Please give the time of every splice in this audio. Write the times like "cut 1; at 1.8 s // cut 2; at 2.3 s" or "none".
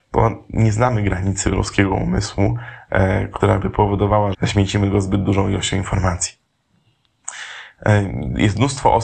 cut 1; at 4.3 s